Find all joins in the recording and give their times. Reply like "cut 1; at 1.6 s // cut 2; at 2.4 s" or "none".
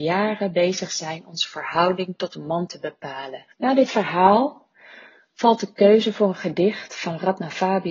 cut 1; at 3.5 s